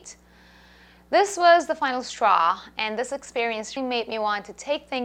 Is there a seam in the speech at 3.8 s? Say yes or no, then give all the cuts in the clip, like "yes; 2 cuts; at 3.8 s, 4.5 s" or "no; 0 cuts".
yes; 1 cut; at 3.8 s